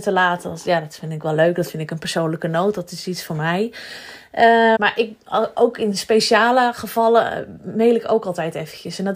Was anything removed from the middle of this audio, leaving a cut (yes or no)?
yes